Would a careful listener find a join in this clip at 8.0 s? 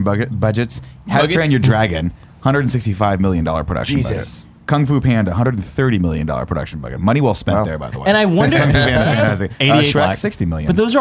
no; 1 cut; at 9.9 s

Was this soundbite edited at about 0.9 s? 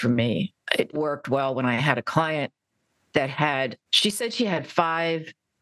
yes; 2 cuts; at 0.9 s, 3.9 s

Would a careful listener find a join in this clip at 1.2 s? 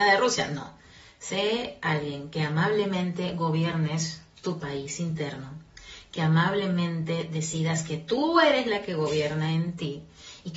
no; 0 cuts

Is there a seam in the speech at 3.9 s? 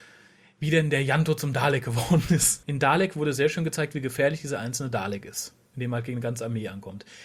no; 1 cut; at 2.6 s

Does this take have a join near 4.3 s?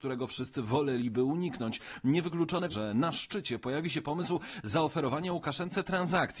no; 1 cut; at 2.7 s

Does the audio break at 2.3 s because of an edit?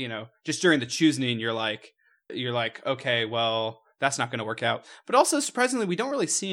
yes; 1 cut; at 2.3 s

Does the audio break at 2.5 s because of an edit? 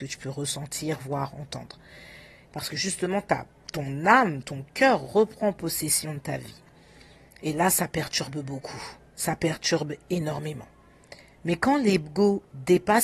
yes; 1 cut; at 2.5 s

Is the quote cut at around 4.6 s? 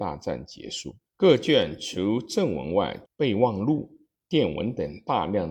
no; 2 cuts; at 1.1 s, 3.1 s

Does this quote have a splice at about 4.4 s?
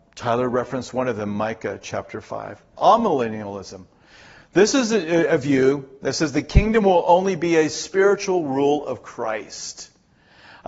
no; 0 cuts

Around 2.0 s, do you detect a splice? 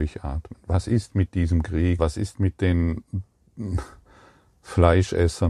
yes; 1 cut; at 2.0 s

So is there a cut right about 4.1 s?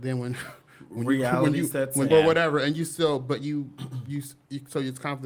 no; 1 cut; at 2.1 s

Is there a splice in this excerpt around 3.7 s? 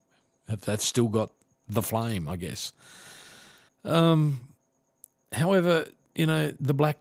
yes; 1 cut; at 3.7 s

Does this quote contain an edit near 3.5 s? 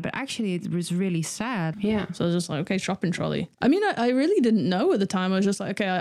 yes; 2 cuts; at 1.7 s, 3.5 s

